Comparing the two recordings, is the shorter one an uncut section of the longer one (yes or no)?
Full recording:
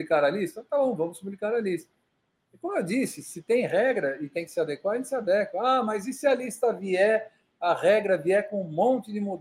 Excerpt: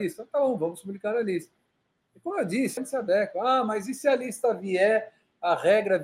no